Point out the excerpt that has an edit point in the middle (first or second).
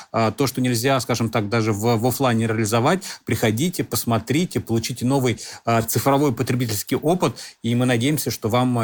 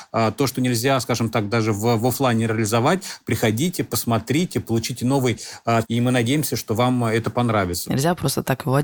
second